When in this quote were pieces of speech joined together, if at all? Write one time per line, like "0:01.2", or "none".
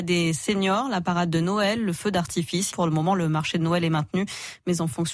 0:02.7